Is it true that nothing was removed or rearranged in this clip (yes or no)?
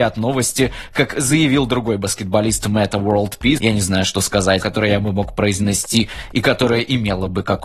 no